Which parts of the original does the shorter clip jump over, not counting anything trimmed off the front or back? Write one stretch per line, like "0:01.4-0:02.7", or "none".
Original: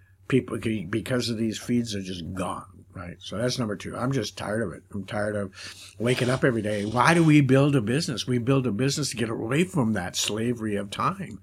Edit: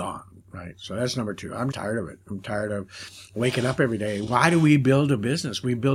0:04.1-0:04.3

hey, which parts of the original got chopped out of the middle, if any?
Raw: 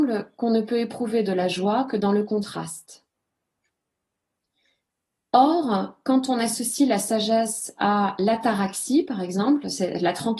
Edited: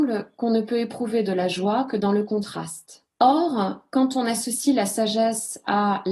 0:03.1-0:05.3

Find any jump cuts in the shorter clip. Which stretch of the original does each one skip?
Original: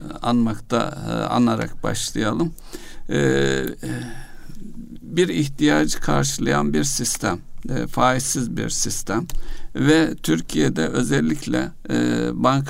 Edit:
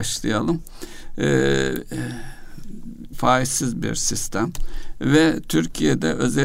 0:05.0-0:07.9

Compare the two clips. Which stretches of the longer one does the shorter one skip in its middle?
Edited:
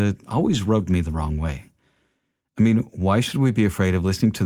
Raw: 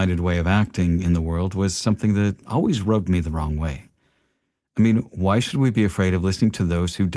none

